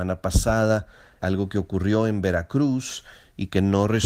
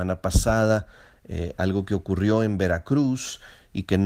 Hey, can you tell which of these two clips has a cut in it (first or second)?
first